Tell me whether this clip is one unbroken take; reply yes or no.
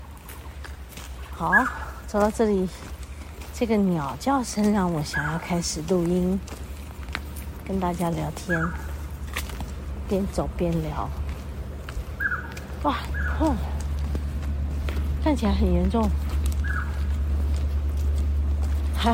no